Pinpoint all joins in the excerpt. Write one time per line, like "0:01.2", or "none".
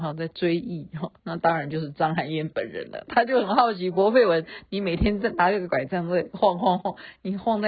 0:01.2